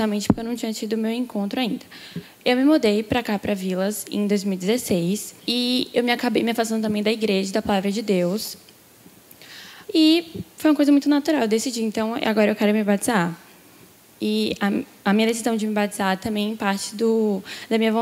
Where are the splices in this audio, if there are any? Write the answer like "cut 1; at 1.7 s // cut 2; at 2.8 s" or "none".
cut 1; at 5.4 s // cut 2; at 9.8 s